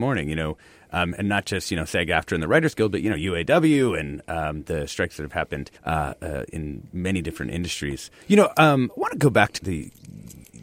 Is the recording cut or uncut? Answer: cut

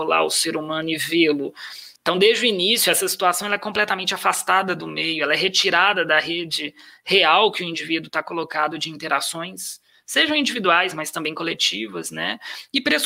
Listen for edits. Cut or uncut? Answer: cut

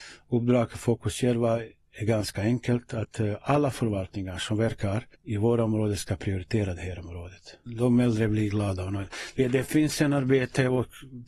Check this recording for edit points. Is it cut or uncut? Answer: cut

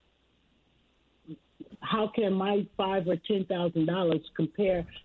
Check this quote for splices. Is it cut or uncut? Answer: cut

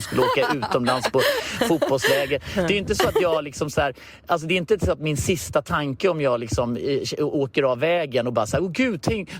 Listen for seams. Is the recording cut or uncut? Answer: uncut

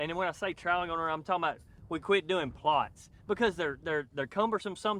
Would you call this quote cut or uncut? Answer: uncut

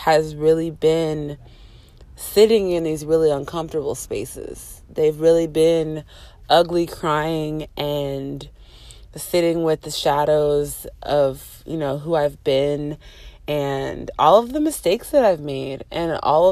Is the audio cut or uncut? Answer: uncut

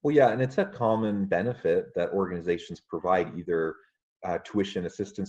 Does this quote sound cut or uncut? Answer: uncut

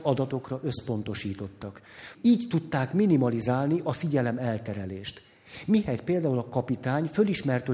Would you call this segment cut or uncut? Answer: cut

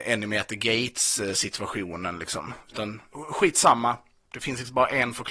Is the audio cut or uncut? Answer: cut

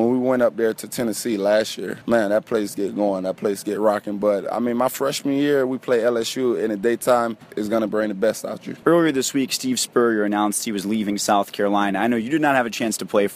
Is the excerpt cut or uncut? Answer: cut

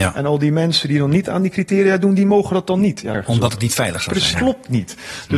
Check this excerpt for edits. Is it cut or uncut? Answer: cut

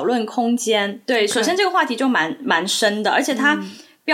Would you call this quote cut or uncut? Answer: cut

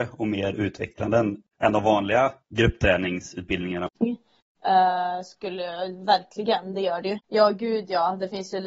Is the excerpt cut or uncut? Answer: cut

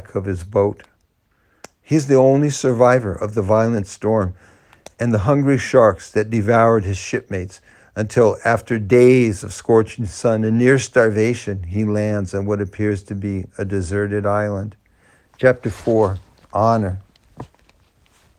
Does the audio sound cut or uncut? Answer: cut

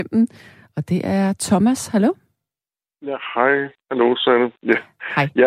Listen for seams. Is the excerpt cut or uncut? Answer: uncut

